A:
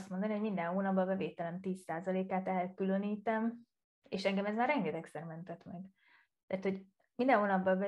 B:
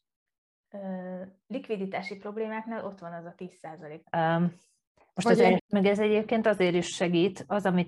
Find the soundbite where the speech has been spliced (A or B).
B